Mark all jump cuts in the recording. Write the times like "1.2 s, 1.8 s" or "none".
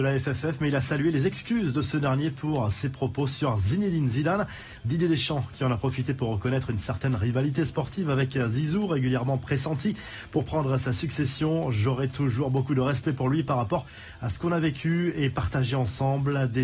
none